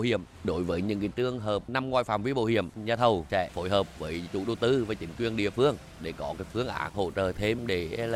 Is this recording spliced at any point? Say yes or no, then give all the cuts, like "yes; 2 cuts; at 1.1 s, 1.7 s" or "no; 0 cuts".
no; 0 cuts